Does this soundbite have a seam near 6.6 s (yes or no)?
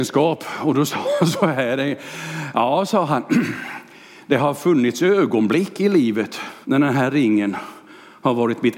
yes